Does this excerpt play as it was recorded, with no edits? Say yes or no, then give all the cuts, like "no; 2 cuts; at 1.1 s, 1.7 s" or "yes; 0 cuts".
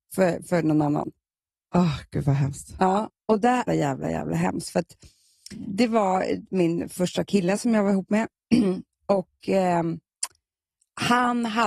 no; 1 cut; at 3.7 s